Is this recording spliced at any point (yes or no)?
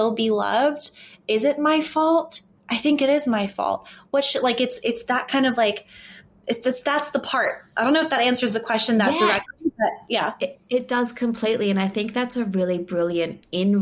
no